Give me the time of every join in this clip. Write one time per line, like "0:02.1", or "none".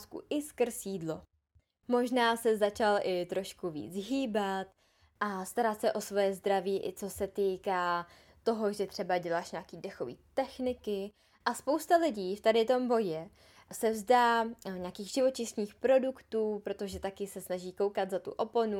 none